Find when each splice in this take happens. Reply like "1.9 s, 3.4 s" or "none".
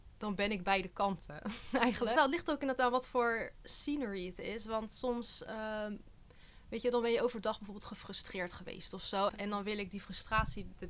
2.2 s, 9.3 s